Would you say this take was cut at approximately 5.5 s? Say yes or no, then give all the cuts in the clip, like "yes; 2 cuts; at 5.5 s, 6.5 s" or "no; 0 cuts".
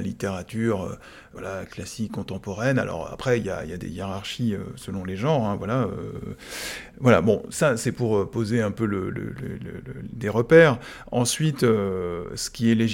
no; 0 cuts